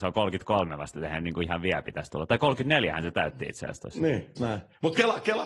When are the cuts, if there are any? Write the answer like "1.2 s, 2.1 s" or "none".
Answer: 4.4 s